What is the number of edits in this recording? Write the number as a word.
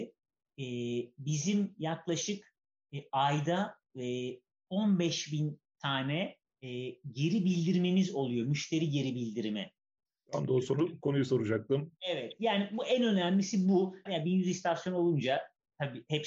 one